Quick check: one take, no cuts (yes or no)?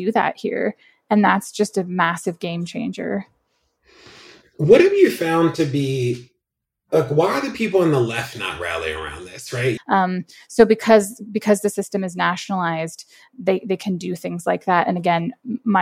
no